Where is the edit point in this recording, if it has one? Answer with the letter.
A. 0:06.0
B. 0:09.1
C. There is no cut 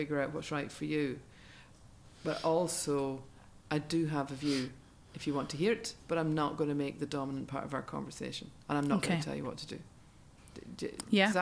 A